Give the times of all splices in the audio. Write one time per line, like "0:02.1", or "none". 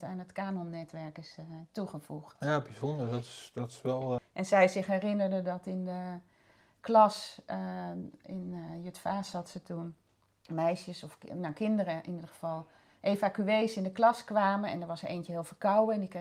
0:04.2